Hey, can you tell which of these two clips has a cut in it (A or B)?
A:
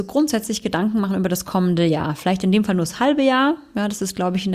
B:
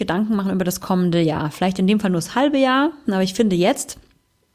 B